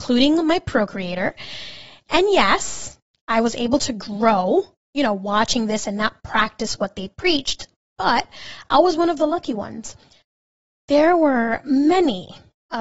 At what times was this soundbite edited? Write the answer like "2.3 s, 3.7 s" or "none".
none